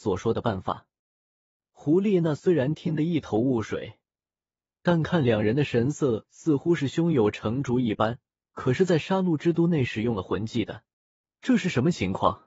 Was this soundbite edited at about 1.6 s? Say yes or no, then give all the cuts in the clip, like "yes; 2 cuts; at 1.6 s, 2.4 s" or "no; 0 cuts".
no; 1 cut; at 8.5 s